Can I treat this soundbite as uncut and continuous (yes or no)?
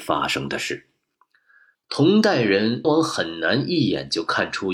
no